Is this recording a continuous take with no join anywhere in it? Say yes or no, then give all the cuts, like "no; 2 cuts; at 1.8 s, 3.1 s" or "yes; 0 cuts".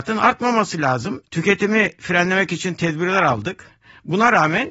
no; 1 cut; at 1.2 s